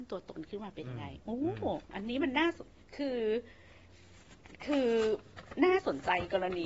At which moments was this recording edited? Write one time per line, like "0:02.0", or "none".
0:01.9